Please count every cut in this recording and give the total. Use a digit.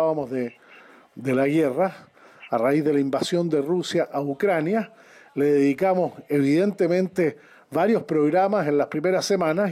0